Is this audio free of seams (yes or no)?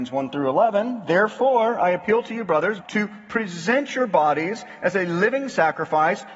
no